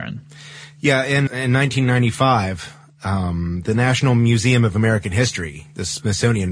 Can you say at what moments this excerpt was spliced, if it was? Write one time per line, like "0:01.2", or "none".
0:01.3